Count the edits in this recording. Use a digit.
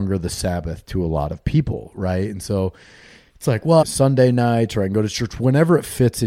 1